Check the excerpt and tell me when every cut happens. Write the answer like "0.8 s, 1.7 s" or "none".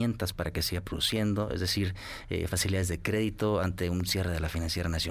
none